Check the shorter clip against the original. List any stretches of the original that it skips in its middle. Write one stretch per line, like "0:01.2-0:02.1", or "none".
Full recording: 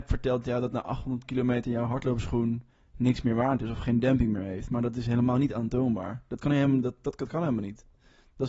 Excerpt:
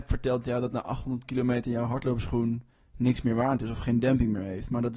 none

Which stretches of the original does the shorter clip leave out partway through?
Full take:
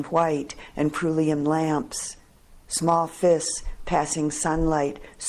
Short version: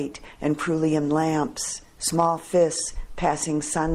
0:02.3-0:02.6

